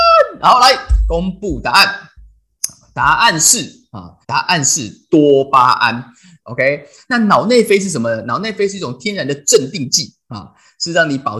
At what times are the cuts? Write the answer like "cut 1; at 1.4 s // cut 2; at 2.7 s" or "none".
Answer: cut 1; at 4.2 s // cut 2; at 6.4 s